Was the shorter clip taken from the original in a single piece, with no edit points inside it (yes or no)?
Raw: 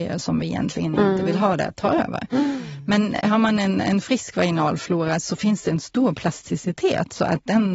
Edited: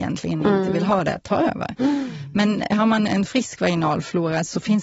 no